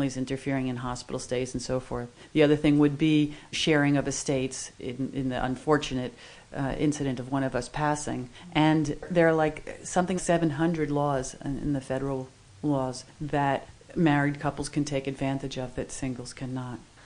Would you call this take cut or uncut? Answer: cut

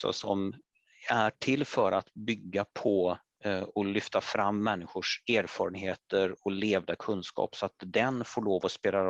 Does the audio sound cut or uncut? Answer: uncut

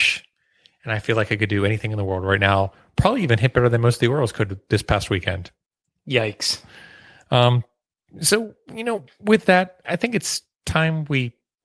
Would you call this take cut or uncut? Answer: cut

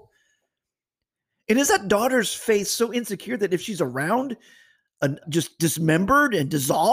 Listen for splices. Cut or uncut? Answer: cut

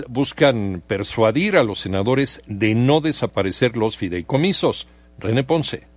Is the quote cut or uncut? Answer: uncut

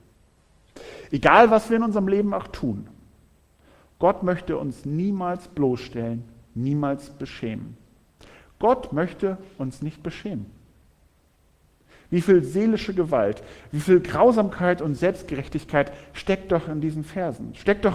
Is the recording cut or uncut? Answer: uncut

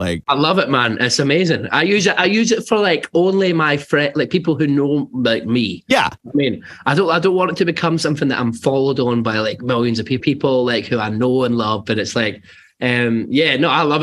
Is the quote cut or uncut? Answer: cut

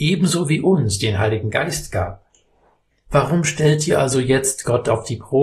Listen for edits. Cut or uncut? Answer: cut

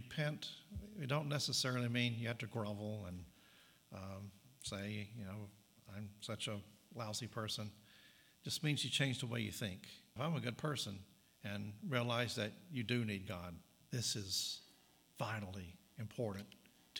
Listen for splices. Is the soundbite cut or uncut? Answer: cut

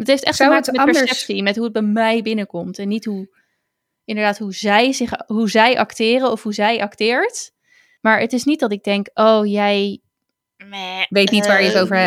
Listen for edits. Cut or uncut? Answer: cut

